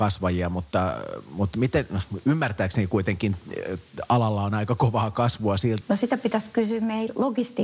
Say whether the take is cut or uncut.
cut